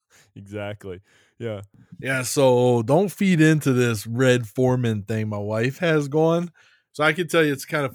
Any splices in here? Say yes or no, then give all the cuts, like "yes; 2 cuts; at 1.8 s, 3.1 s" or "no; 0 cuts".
yes; 1 cut; at 6.9 s